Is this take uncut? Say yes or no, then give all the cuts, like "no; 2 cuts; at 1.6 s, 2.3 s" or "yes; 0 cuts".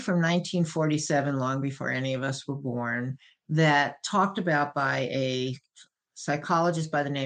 yes; 0 cuts